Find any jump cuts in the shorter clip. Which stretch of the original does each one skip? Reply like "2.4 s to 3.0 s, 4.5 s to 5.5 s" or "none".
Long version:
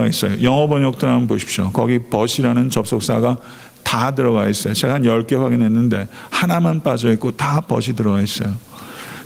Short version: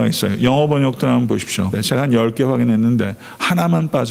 1.7 s to 4.6 s